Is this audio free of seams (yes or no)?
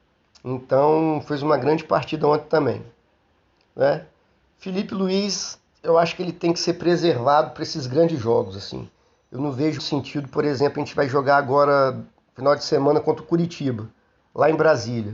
no